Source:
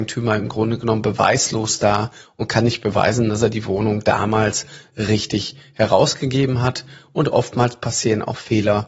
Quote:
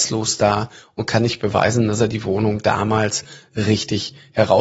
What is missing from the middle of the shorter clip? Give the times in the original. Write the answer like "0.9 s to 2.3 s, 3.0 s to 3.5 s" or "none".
none